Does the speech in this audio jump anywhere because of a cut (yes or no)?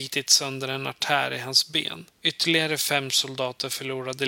yes